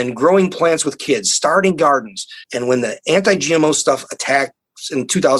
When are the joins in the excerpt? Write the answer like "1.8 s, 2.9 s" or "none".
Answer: 2.4 s